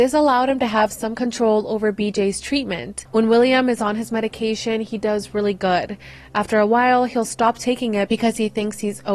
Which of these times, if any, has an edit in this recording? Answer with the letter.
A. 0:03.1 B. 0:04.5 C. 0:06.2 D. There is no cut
A